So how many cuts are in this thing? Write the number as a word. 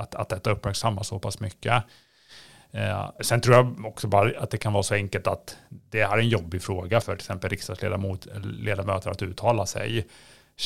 two